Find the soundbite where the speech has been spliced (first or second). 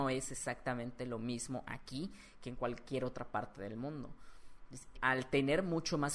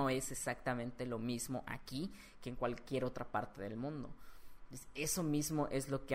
first